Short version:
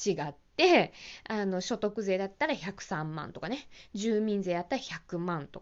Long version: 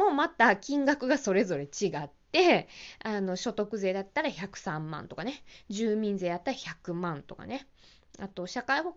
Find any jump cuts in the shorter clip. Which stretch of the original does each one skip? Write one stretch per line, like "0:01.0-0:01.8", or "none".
none